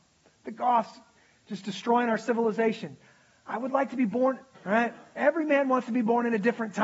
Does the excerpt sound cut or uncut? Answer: cut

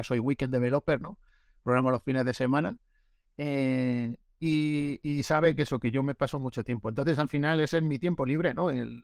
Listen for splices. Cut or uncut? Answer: uncut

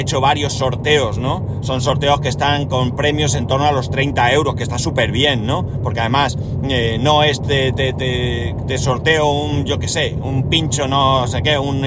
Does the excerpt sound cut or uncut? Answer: uncut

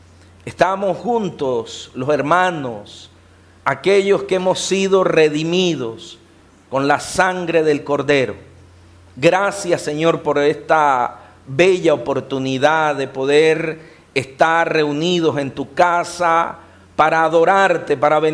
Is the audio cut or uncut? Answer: uncut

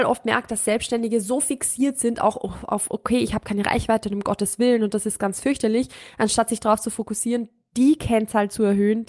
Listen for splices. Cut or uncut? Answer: uncut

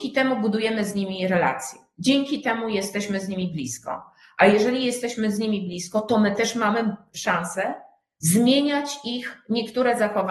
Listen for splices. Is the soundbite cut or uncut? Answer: uncut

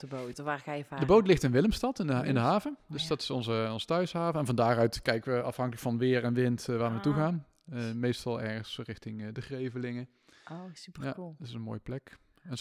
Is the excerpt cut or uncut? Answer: uncut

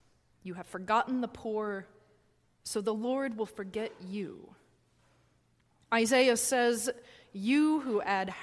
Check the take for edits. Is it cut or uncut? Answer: uncut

